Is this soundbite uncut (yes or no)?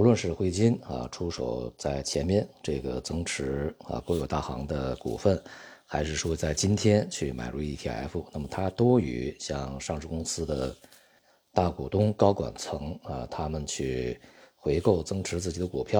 yes